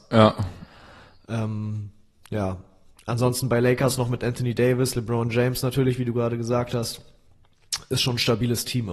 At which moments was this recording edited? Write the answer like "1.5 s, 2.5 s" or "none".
none